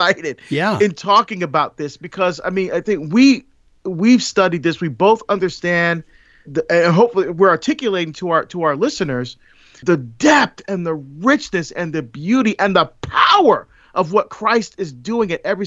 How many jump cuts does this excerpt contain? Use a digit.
1